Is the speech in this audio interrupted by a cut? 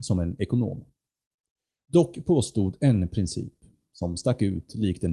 no; 0 cuts

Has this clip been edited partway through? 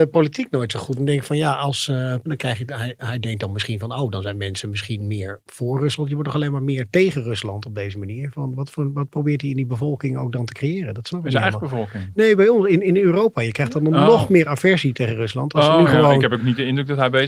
yes; 1 cut; at 2.3 s

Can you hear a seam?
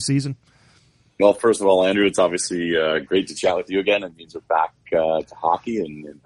no; 0 cuts

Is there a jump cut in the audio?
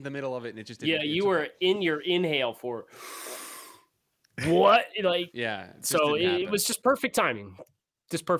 no; 0 cuts

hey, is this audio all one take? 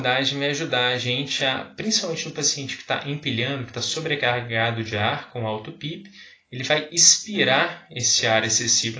yes; 0 cuts

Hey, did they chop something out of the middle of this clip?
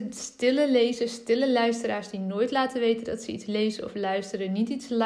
no; 0 cuts

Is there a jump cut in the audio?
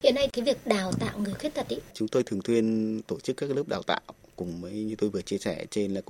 yes; 1 cut; at 1.9 s

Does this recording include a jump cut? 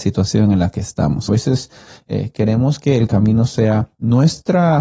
yes; 1 cut; at 1.3 s

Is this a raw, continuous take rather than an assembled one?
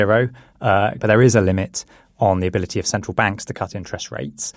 no; 1 cut; at 1.0 s

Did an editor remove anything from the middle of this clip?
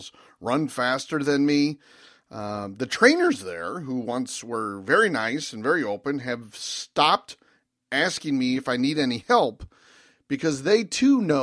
no; 0 cuts

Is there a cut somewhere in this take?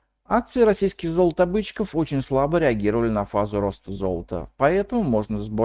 no; 0 cuts

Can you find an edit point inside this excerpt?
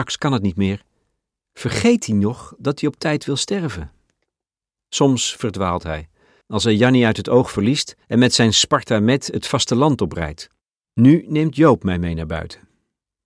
yes; 3 cuts; at 6.4 s, 8.0 s, 10.8 s

